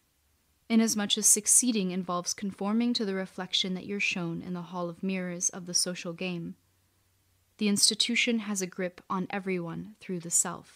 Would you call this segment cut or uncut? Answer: uncut